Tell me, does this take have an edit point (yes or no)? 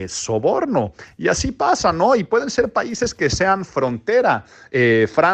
no